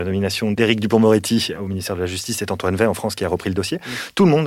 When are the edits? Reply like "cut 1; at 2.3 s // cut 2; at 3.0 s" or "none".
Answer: none